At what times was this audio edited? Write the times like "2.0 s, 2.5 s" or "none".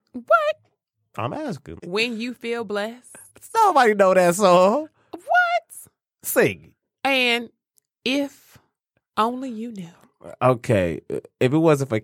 1.8 s